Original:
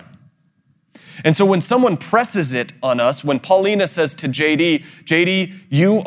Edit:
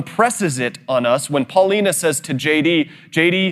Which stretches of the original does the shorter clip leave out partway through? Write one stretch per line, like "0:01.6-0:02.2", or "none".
none